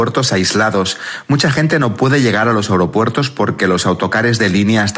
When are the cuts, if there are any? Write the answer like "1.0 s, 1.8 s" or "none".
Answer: none